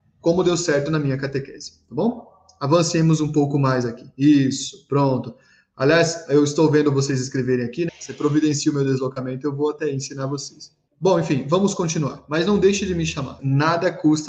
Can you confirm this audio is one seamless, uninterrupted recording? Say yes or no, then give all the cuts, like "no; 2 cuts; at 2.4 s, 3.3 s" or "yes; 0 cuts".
no; 3 cuts; at 7.9 s, 10.9 s, 13.4 s